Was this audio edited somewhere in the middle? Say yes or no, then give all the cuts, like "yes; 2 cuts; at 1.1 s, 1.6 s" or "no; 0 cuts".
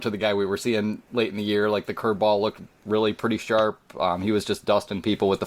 no; 0 cuts